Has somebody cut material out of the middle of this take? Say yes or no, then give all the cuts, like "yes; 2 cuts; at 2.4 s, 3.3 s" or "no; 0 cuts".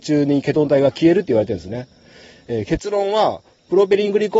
no; 0 cuts